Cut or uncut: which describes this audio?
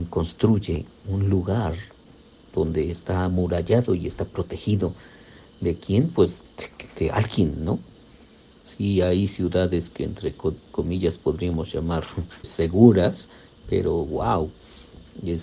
cut